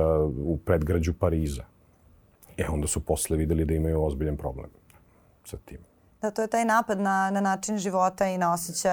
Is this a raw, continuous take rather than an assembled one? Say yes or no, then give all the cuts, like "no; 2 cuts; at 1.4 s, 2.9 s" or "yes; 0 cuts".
yes; 0 cuts